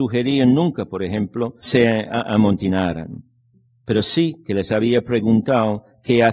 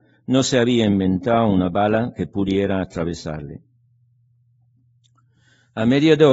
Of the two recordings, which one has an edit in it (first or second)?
first